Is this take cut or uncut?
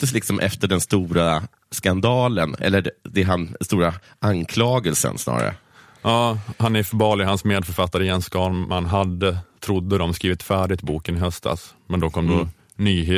uncut